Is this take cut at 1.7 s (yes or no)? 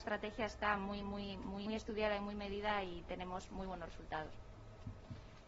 yes